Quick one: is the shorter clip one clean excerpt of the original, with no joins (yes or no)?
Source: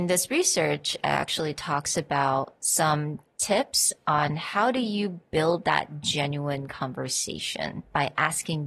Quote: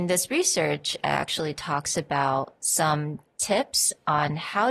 yes